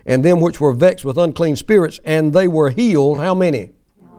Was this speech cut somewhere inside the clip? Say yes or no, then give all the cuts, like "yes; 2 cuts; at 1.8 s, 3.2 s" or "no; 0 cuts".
no; 0 cuts